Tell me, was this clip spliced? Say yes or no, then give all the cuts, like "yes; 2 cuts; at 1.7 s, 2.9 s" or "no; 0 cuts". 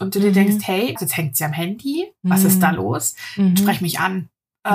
yes; 1 cut; at 1.0 s